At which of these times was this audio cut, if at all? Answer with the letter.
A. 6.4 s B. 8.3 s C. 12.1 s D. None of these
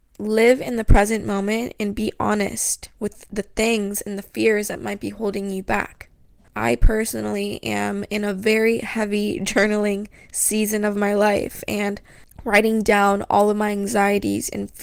A